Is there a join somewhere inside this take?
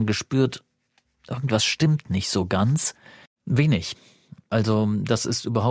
yes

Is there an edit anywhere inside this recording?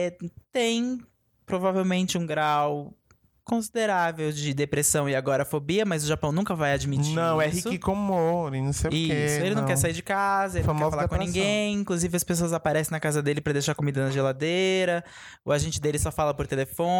no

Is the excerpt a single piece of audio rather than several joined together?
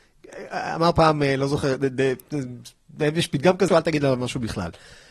no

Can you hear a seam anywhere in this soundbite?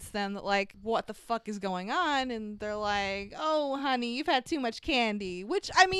no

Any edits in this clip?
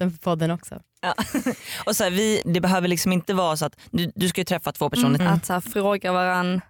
yes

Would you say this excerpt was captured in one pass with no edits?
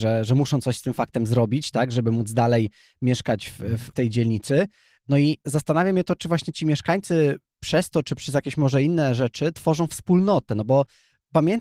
yes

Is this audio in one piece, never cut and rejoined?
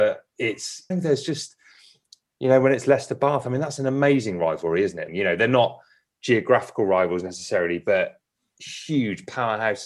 no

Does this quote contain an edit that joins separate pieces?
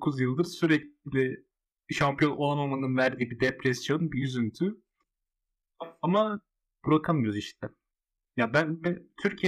no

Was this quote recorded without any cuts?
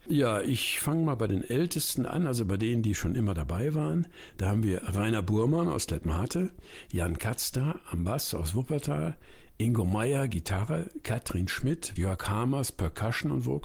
no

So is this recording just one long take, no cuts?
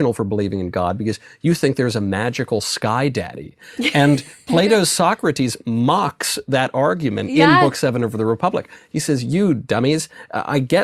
yes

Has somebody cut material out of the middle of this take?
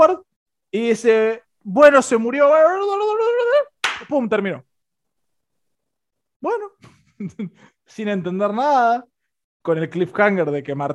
no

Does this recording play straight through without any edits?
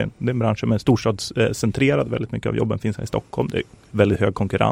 yes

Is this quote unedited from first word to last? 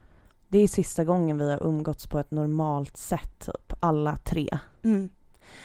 yes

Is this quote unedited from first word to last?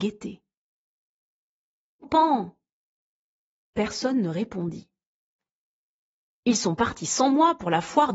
no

